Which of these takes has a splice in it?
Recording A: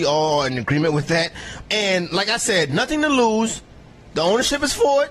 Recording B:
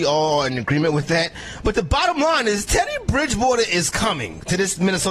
A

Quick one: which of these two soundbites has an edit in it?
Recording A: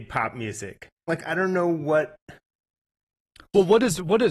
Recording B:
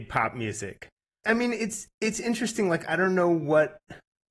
A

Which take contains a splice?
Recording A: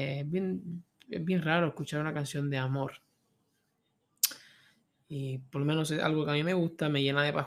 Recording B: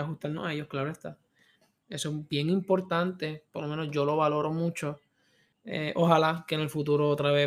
B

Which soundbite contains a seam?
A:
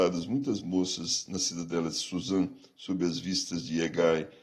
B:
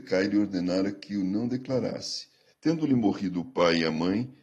B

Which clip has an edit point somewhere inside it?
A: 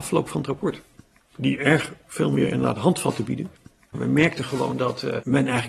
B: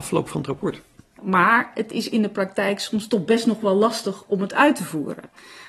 B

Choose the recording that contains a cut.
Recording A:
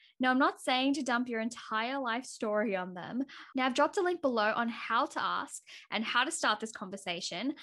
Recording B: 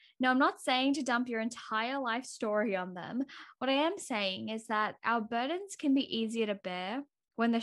A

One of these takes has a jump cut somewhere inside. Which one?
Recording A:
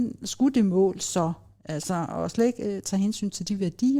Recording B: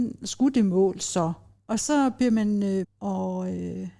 B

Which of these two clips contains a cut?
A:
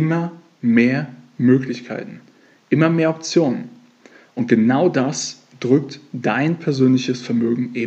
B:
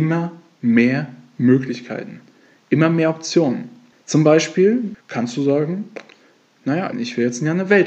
B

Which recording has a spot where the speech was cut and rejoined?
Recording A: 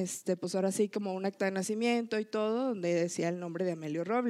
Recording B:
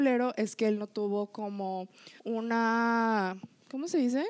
B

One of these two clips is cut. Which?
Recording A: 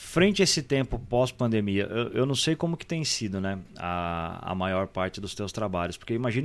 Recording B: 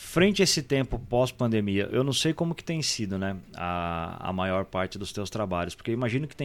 B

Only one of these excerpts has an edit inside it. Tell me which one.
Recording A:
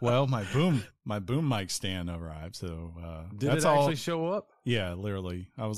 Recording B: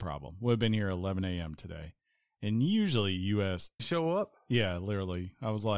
B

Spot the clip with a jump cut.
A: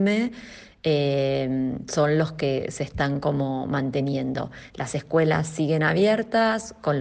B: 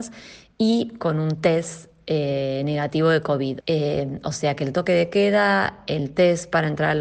B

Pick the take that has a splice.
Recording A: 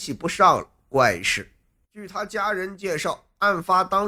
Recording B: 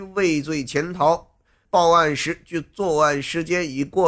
B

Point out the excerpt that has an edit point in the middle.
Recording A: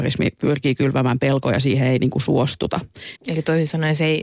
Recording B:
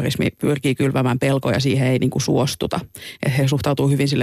A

